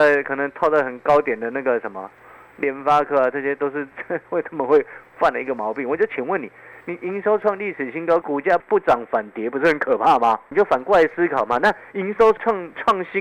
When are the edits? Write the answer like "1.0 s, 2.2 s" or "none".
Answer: none